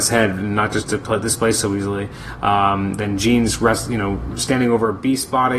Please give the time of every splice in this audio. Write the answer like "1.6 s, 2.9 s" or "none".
none